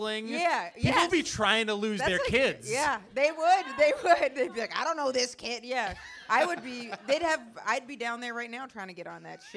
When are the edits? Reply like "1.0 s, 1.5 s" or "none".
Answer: none